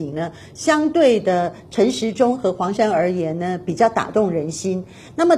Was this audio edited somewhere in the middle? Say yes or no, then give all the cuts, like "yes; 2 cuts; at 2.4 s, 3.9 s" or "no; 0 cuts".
yes; 1 cut; at 2.7 s